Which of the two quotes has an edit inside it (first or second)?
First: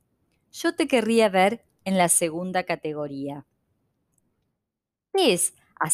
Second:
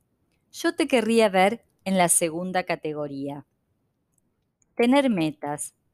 second